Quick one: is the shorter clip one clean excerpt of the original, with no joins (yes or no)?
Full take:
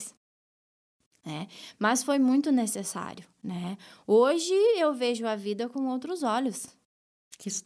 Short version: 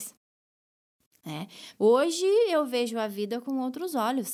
no